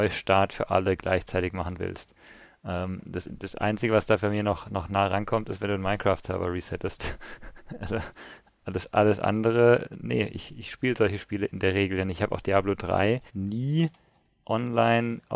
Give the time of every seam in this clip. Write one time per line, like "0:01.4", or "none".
0:09.8
0:13.3